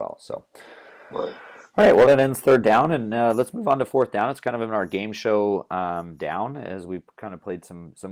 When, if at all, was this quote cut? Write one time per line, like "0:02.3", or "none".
none